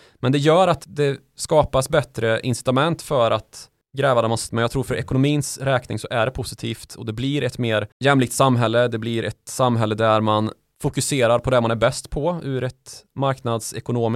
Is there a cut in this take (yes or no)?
yes